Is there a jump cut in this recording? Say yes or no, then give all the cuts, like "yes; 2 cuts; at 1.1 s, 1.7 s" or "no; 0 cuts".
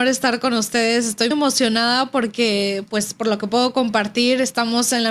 yes; 1 cut; at 1.3 s